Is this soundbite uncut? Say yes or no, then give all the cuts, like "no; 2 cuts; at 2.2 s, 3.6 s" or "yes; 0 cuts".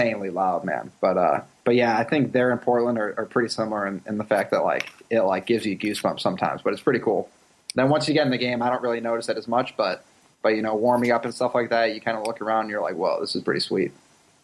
yes; 0 cuts